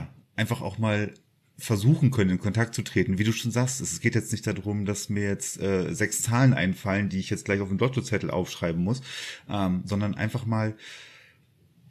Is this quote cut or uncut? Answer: uncut